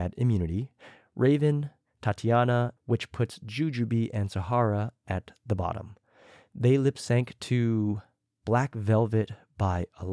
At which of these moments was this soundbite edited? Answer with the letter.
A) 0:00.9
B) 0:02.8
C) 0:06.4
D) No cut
B